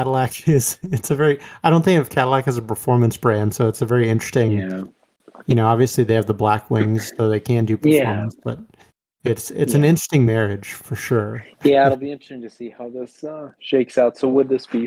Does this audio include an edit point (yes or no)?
no